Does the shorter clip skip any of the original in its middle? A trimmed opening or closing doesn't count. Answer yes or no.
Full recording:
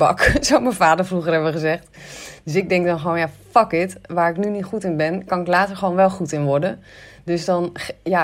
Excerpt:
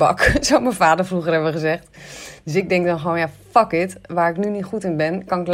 no